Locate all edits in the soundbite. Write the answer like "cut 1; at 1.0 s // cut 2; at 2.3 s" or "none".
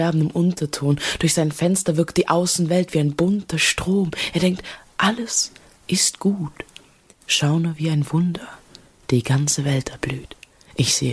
none